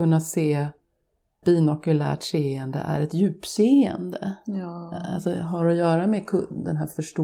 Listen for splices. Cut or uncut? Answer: cut